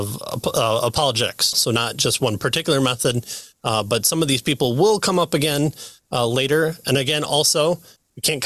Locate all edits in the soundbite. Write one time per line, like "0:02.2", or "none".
0:01.5